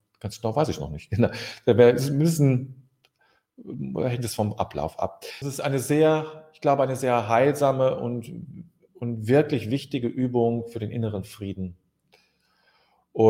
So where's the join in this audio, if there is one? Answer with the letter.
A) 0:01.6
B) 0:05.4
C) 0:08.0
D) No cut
B